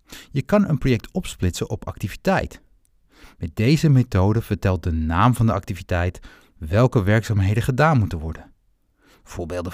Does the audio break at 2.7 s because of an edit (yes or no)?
no